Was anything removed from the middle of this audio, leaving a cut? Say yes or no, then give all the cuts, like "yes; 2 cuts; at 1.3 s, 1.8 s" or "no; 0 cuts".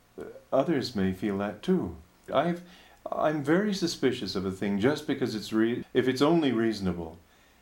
yes; 2 cuts; at 2.3 s, 5.8 s